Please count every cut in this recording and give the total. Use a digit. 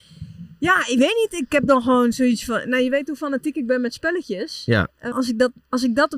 1